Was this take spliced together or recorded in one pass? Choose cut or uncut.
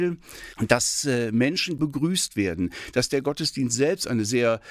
cut